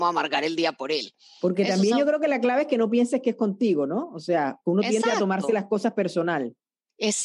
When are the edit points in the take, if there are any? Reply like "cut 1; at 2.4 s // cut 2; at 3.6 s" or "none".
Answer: none